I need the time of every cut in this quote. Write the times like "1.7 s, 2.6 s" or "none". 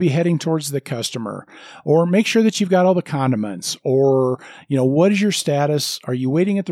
none